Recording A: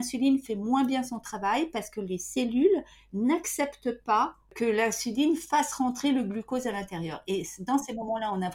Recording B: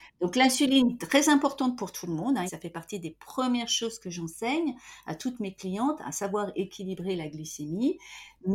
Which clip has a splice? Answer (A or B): B